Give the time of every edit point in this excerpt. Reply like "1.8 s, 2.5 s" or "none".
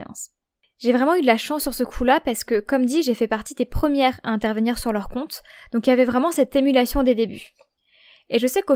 none